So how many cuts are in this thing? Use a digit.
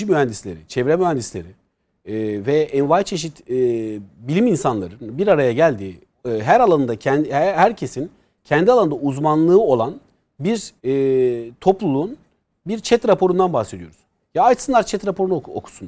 1